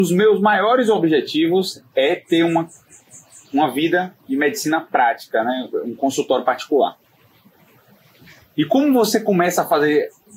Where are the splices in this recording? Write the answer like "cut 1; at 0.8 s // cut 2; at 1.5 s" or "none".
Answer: none